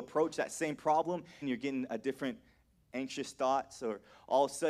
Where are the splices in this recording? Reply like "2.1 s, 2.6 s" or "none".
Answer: 1.4 s